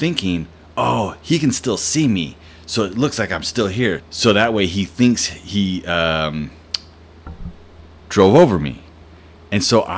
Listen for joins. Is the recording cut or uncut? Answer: cut